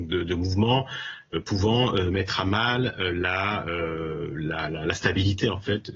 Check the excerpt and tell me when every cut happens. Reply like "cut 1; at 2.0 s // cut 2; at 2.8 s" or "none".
none